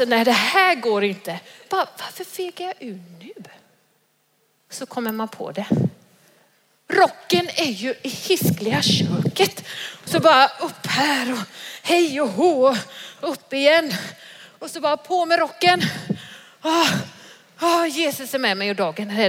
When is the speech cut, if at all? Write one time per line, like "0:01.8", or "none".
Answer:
none